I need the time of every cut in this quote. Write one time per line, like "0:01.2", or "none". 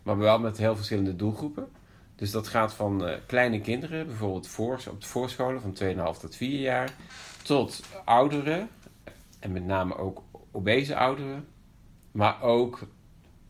0:12.1